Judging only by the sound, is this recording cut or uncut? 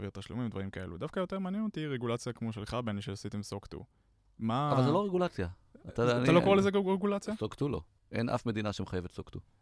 uncut